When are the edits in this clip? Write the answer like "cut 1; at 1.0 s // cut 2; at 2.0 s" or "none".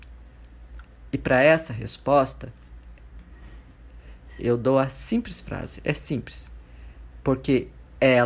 none